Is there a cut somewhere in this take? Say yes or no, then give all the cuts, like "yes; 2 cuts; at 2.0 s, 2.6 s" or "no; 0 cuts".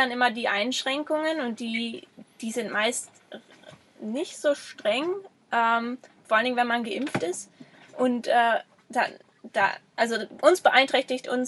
no; 0 cuts